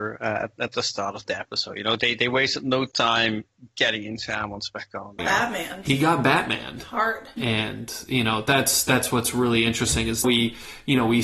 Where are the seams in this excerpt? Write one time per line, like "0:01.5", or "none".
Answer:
0:05.2
0:07.4
0:10.2

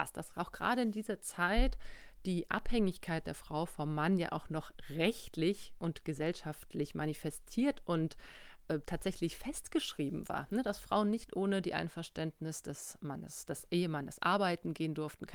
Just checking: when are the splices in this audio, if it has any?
none

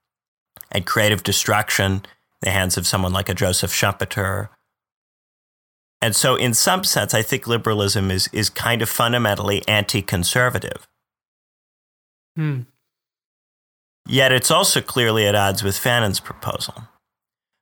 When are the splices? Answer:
none

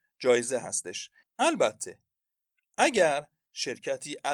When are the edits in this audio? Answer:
0:01.2

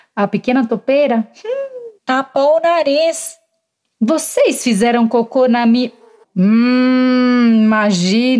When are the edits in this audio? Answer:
0:02.0
0:06.2

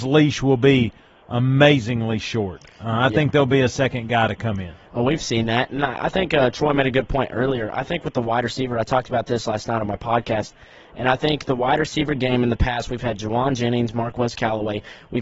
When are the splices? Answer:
none

